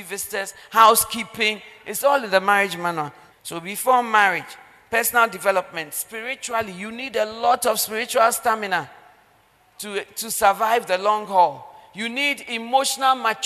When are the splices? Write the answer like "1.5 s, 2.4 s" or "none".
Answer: 3.3 s